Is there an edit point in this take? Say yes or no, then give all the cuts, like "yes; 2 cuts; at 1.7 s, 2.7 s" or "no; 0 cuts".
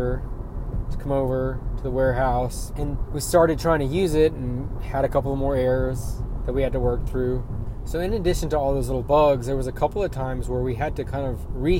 no; 0 cuts